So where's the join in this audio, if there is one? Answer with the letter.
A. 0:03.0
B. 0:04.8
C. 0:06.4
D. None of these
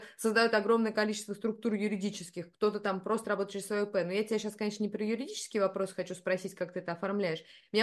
D